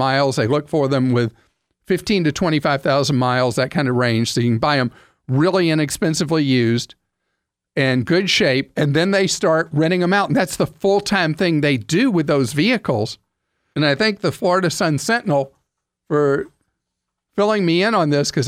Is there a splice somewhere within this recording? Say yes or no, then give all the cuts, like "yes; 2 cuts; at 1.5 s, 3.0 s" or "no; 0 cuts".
yes; 1 cut; at 13.7 s